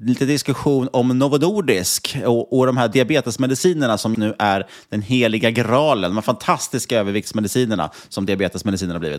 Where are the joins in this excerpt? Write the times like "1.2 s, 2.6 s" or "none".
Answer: 4.1 s